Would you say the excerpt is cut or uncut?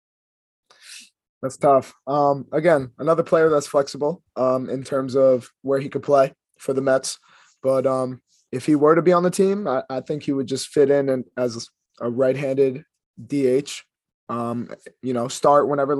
uncut